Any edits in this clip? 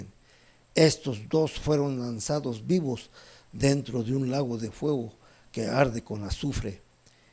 no; 0 cuts

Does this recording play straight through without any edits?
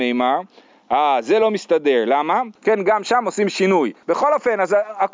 no; 2 cuts; at 2.6 s, 4.0 s

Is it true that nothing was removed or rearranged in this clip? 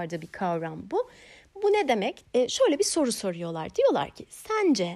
no; 1 cut; at 2.3 s

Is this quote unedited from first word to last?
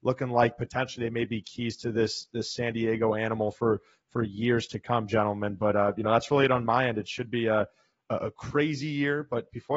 yes; 0 cuts

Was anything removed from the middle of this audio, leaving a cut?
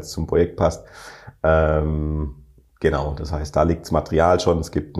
no; 0 cuts

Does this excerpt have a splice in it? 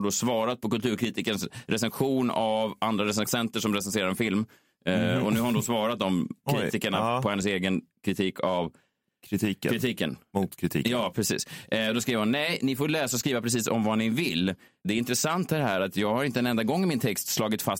no; 0 cuts

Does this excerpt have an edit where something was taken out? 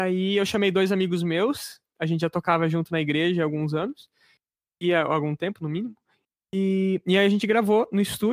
no; 0 cuts

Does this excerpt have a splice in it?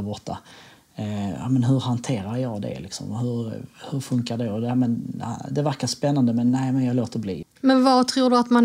yes; 1 cut; at 7.4 s

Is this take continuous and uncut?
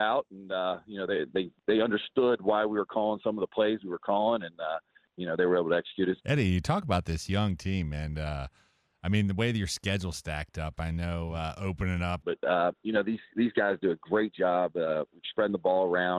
no; 2 cuts; at 6.2 s, 12.2 s

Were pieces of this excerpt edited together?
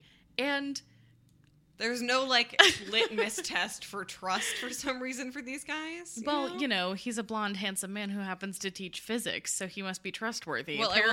no; 0 cuts

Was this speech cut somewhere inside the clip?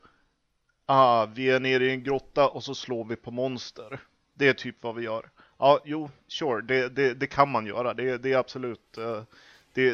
no; 0 cuts

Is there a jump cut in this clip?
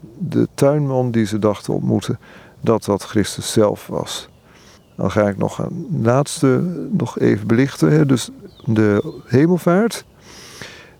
yes; 1 cut; at 8.5 s

